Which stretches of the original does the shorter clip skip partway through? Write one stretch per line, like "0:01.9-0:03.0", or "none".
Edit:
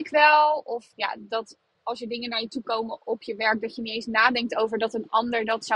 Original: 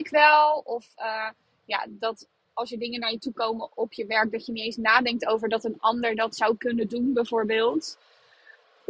0:00.9-0:01.6